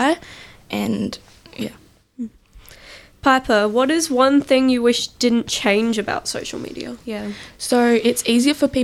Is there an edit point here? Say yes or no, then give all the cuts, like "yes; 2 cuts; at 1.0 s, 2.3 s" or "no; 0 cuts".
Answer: yes; 1 cut; at 7.0 s